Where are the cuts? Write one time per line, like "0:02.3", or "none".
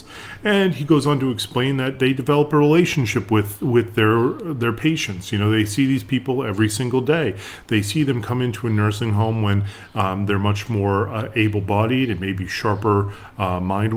none